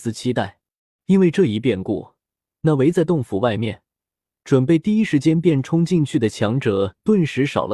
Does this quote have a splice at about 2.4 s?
no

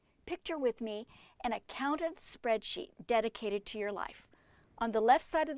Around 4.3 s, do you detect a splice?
no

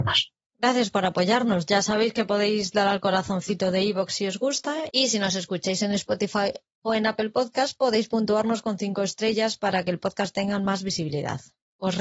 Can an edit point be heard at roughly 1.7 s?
no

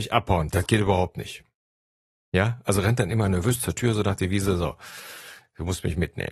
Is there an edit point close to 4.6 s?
no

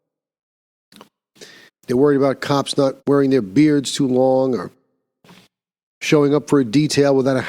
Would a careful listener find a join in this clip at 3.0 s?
yes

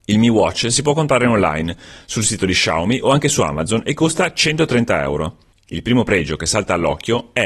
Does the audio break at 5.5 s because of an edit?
yes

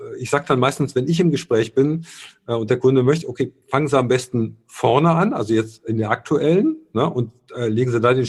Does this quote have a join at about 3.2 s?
yes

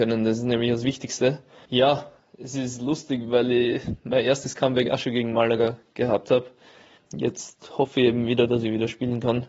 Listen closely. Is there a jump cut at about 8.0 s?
no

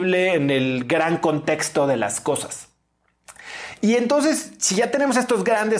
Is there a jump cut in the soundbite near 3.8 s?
no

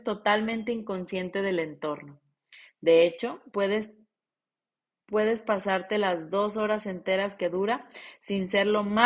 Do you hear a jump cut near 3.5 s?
yes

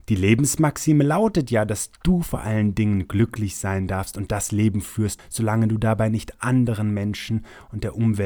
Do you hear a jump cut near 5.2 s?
yes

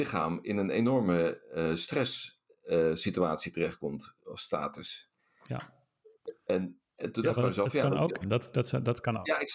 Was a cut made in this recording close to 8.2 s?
yes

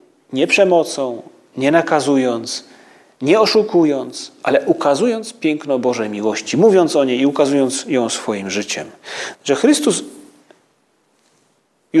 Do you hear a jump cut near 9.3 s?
yes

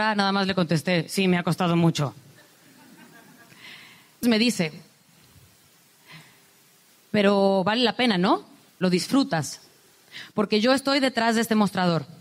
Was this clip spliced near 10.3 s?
no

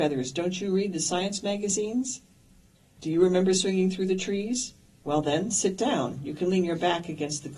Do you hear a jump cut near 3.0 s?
yes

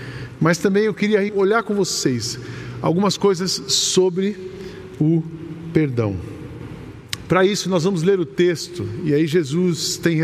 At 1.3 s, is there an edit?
yes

